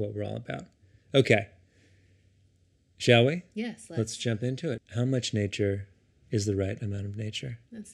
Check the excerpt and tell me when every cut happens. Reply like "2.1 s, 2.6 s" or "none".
4.8 s